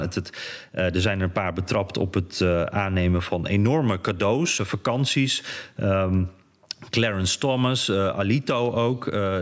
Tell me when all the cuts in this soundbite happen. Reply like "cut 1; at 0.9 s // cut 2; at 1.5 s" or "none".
cut 1; at 4.6 s